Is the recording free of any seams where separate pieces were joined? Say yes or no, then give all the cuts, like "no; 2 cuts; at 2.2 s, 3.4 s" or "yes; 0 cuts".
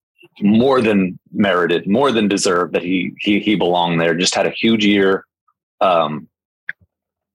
no; 1 cut; at 1.2 s